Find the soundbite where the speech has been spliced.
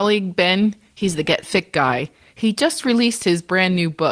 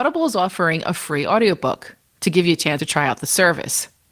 second; 1 cut; at 2.8 s

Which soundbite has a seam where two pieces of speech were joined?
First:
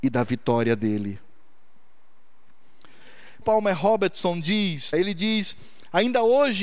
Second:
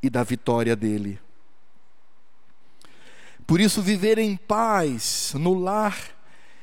first; 2 cuts; at 3.4 s, 4.9 s

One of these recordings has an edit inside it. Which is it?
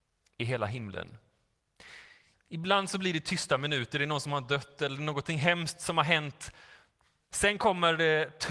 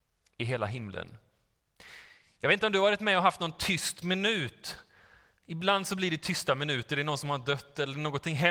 first; 2 cuts; at 2.3 s, 7.2 s

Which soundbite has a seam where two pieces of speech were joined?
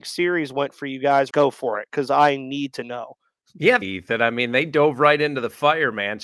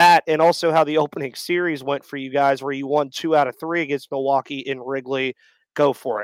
first; 2 cuts; at 1.3 s, 3.8 s

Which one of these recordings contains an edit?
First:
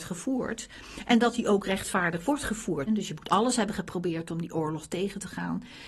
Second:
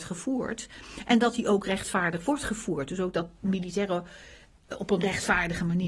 first; 1 cut; at 2.9 s

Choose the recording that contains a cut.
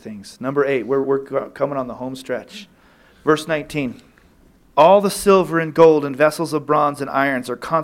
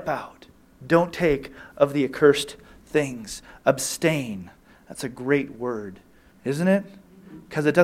first; 1 cut; at 1.0 s

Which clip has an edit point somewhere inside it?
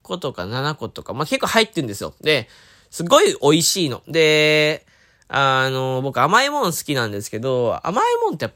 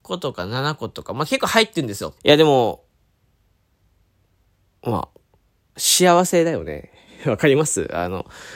second; 2 cuts; at 2.2 s, 5.8 s

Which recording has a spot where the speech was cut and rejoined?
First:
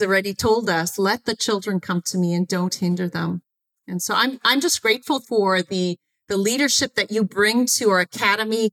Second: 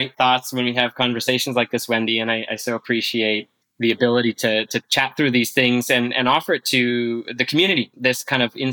first; 1 cut; at 5.2 s

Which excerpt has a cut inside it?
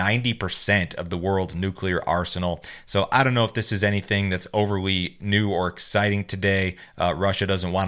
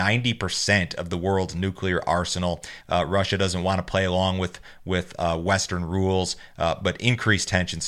second; 1 cut; at 2.8 s

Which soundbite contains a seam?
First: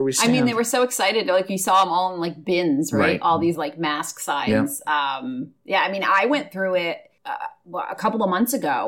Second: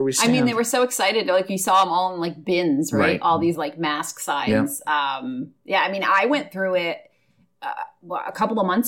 first; 1 cut; at 7.2 s

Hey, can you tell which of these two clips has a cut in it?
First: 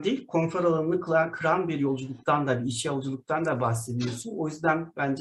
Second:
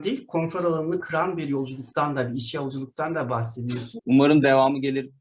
second; 2 cuts; at 1.0 s, 4.0 s

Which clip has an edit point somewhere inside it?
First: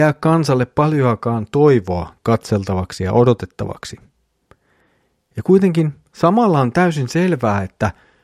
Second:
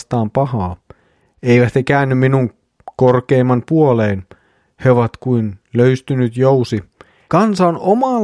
second; 1 cut; at 7.3 s

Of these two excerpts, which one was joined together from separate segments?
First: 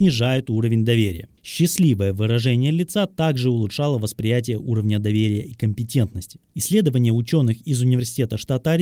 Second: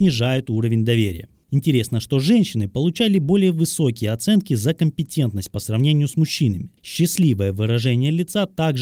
first; 2 cuts; at 1.4 s, 6.5 s

